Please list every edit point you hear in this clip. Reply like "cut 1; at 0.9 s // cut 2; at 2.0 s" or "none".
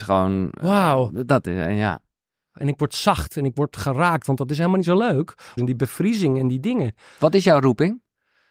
cut 1; at 5.6 s